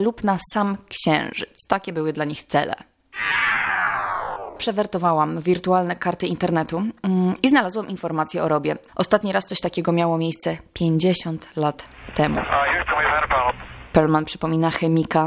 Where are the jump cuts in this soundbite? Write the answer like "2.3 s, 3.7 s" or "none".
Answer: 8.9 s

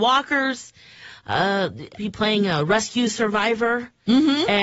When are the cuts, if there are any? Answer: 1.9 s

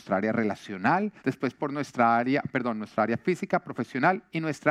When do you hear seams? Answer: 1.2 s

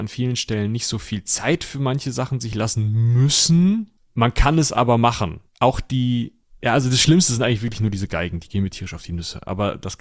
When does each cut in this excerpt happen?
5.5 s

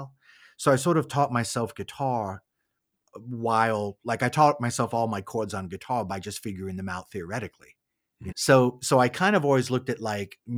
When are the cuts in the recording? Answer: 8.3 s

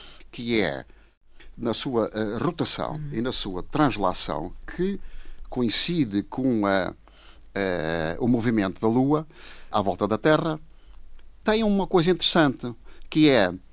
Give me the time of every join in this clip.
none

